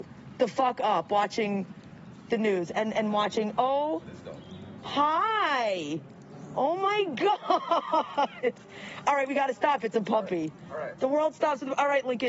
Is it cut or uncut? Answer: uncut